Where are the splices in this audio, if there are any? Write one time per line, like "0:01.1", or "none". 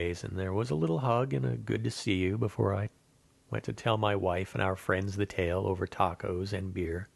none